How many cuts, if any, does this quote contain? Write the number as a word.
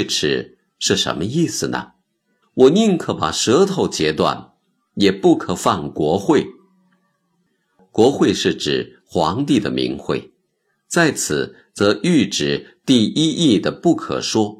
one